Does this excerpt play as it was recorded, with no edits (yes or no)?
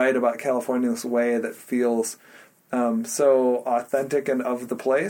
yes